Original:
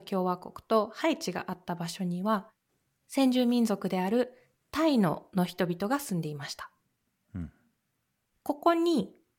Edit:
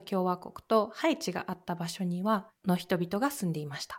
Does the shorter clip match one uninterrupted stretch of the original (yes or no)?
no